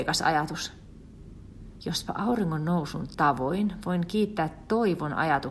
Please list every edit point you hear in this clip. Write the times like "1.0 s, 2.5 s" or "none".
1.8 s